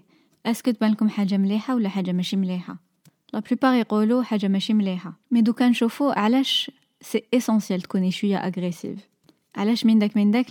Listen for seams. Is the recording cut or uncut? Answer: cut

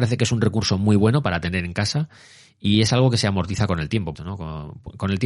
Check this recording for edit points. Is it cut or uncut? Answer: cut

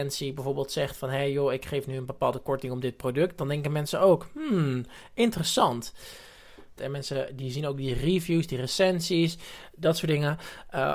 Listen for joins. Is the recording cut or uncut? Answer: cut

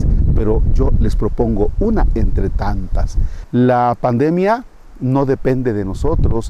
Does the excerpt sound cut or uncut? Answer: cut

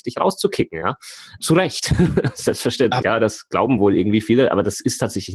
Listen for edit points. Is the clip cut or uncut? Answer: cut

